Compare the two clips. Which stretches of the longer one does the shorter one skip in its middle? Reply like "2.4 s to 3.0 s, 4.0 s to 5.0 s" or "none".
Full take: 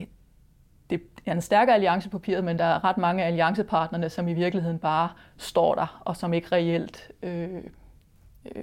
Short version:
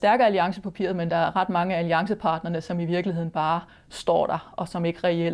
none